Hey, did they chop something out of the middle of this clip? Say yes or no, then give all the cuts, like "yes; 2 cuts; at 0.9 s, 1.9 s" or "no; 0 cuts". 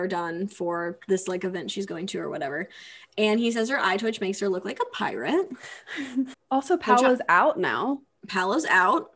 yes; 1 cut; at 6.3 s